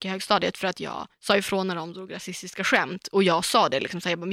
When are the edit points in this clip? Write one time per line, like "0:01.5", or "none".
0:01.1